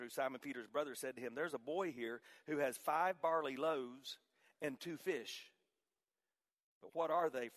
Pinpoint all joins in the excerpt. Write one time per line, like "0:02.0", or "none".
none